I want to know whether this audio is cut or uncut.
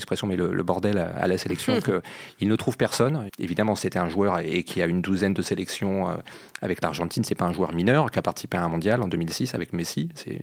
cut